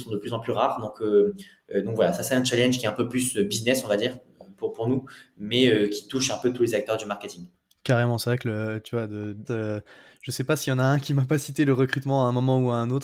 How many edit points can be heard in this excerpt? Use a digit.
1